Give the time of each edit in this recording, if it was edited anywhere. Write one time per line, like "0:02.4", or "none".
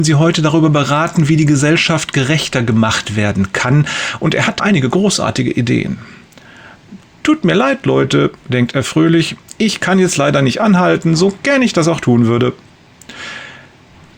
0:04.6